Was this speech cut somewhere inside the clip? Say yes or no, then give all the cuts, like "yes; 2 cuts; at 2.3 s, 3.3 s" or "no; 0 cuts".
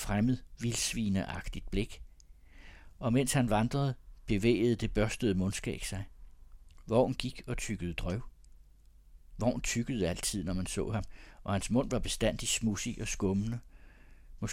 no; 0 cuts